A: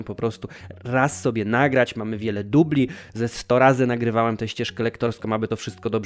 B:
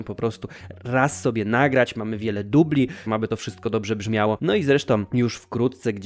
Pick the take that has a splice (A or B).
B